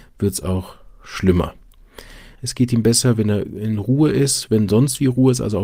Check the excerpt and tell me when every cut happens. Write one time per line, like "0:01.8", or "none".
0:02.4